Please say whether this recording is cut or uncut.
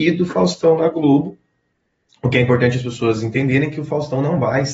uncut